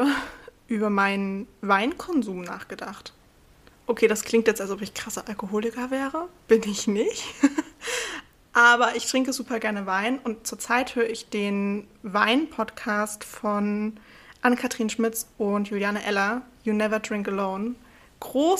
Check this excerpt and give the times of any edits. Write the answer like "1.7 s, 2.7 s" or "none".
none